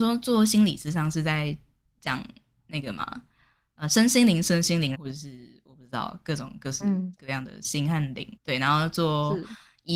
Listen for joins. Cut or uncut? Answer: cut